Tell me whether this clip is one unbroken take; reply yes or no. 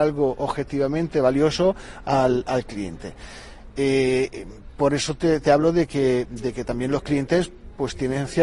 yes